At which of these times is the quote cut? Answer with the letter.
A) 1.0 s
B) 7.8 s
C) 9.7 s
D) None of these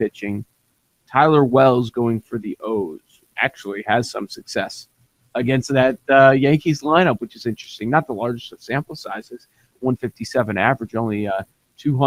C